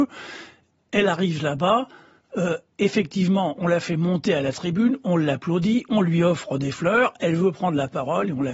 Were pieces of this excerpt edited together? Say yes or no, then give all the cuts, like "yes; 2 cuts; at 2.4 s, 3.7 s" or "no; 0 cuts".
no; 0 cuts